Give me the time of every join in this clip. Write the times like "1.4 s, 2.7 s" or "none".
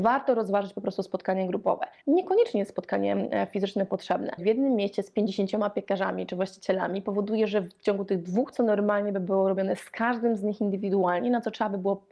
2.0 s, 4.4 s, 8.5 s

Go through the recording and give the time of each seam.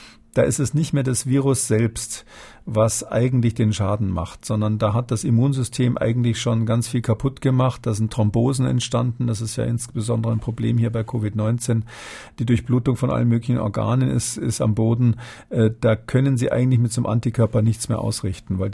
none

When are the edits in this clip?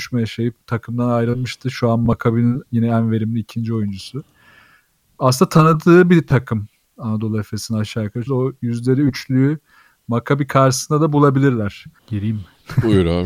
8.3 s, 12.0 s

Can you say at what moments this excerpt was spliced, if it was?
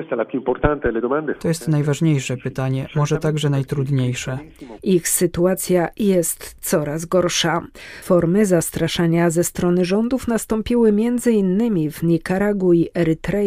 4.8 s

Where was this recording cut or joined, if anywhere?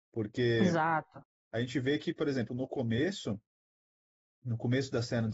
none

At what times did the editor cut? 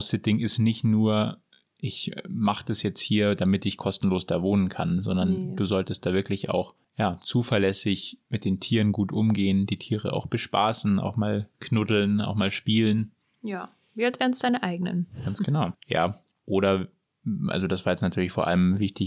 15.7 s

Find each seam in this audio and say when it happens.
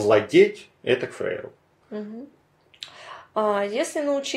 1.8 s

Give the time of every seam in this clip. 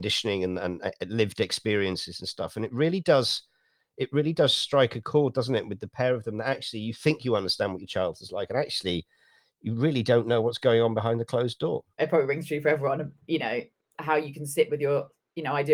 12.0 s

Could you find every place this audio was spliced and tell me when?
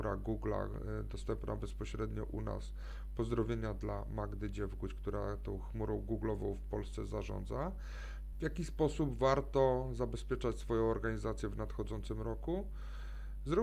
8.3 s

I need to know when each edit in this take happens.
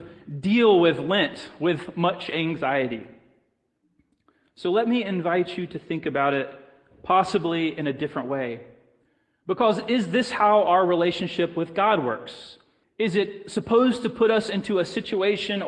12.8 s

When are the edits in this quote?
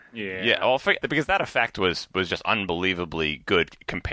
1.0 s

